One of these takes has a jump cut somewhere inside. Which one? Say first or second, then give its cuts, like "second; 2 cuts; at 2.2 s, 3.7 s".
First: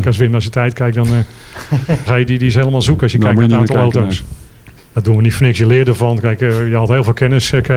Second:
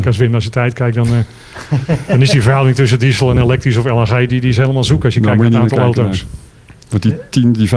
first; 2 cuts; at 2.1 s, 4.8 s